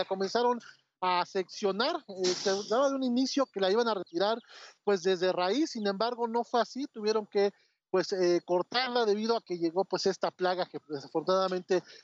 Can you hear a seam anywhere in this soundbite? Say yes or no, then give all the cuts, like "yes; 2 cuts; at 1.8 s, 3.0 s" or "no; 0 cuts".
no; 0 cuts